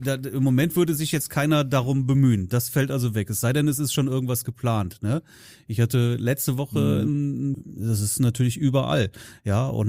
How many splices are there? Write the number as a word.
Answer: one